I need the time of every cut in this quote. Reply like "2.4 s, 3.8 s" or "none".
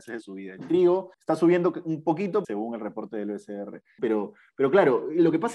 1.1 s, 2.4 s, 4.0 s

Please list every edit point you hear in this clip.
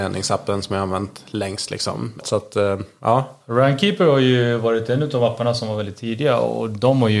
2.2 s

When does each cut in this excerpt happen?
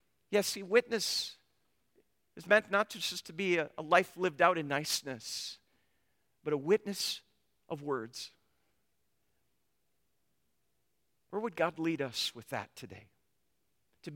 none

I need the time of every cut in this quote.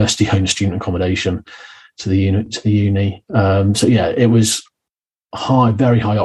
none

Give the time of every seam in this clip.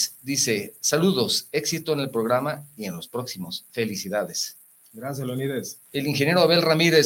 5.9 s

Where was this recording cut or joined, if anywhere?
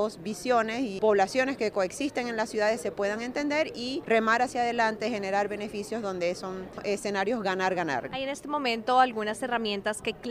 8.1 s

